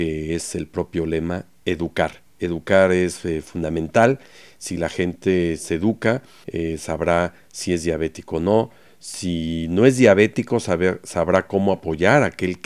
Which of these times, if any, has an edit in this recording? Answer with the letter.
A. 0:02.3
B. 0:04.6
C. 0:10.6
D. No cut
D